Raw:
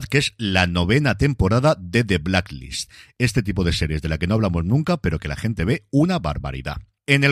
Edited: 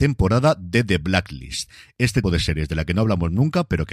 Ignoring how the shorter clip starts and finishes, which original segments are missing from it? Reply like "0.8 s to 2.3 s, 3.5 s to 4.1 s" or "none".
3.4 s to 3.6 s